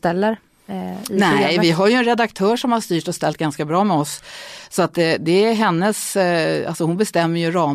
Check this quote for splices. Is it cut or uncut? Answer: uncut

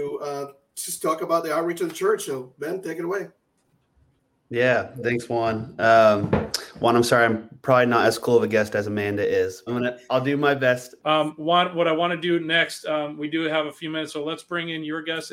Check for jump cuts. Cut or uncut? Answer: cut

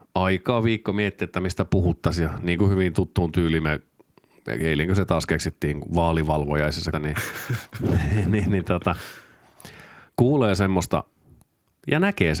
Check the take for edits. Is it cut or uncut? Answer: cut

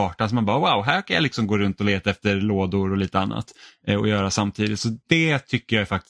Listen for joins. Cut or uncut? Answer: uncut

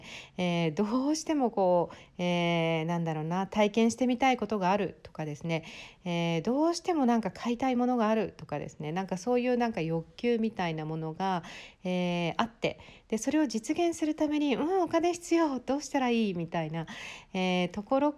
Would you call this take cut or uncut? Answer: uncut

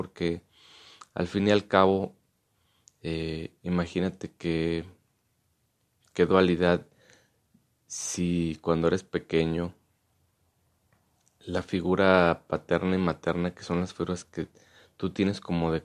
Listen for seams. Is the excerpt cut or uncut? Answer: uncut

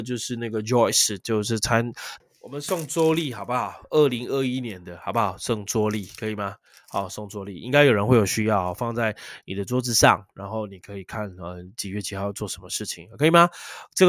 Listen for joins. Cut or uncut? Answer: cut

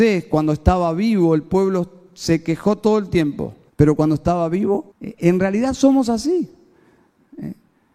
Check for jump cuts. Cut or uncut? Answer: cut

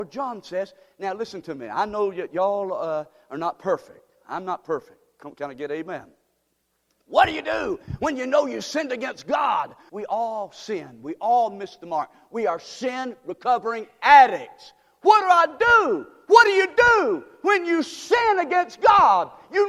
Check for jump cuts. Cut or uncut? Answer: cut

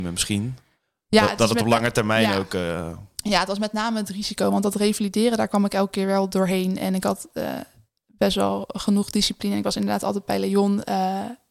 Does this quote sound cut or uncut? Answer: uncut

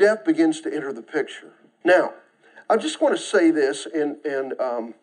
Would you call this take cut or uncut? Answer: cut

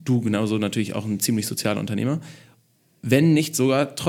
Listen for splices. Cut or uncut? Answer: uncut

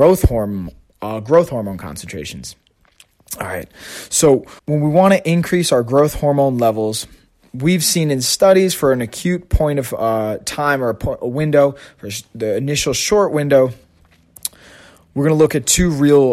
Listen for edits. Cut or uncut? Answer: cut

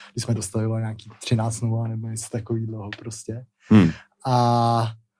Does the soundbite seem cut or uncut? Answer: uncut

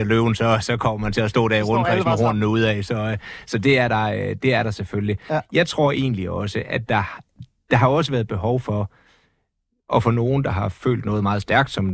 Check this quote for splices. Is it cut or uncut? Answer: uncut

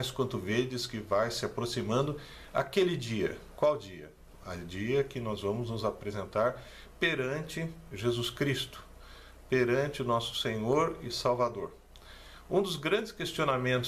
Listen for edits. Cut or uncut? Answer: uncut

